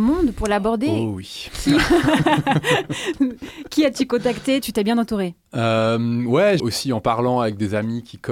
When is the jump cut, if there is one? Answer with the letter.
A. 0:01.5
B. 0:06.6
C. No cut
B